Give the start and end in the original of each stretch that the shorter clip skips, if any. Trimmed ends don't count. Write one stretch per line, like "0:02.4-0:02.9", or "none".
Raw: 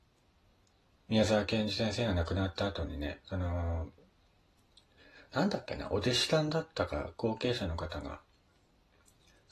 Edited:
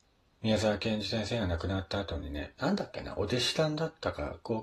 0:03.2-0:05.3